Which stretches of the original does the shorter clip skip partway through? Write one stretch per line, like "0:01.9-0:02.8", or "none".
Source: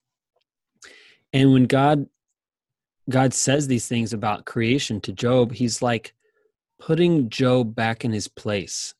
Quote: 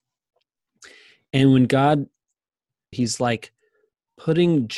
0:02.9-0:05.5